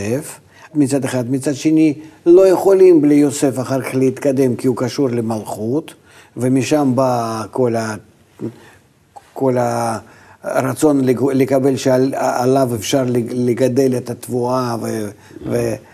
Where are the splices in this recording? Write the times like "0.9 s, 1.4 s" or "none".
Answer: none